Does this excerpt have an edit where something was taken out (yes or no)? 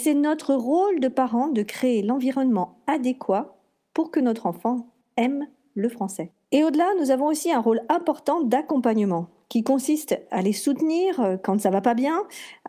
no